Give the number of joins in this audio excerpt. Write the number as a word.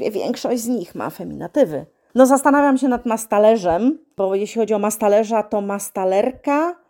zero